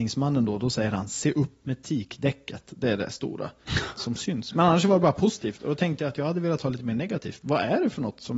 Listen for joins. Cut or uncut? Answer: uncut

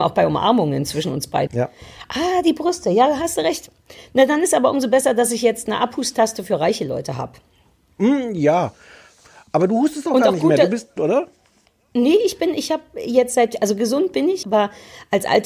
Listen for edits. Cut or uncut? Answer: cut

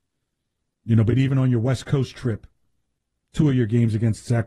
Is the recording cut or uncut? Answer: uncut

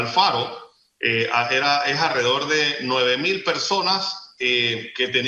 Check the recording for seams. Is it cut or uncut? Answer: uncut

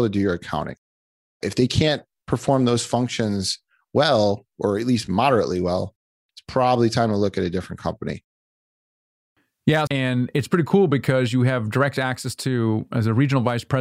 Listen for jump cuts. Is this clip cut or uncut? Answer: cut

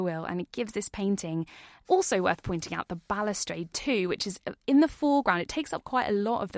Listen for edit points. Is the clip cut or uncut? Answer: cut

